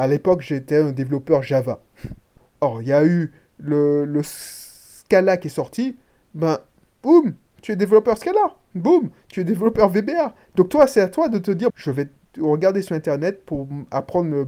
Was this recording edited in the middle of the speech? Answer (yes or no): yes